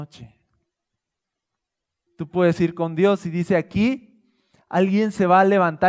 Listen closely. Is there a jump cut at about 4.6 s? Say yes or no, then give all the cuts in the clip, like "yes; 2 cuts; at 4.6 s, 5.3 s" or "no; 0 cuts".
no; 1 cut; at 2.1 s